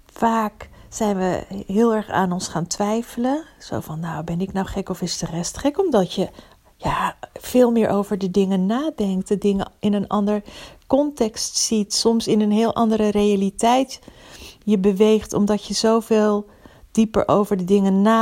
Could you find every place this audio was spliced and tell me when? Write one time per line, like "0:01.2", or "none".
none